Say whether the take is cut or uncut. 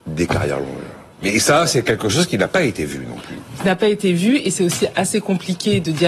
uncut